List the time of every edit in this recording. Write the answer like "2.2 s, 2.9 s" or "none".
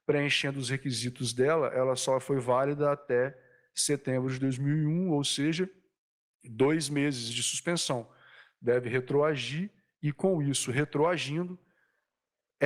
none